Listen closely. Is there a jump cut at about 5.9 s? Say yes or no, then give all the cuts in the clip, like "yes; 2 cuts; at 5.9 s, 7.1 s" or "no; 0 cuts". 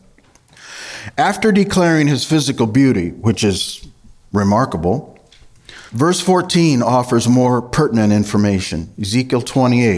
yes; 1 cut; at 5.9 s